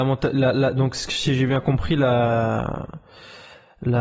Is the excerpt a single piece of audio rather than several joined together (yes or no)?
yes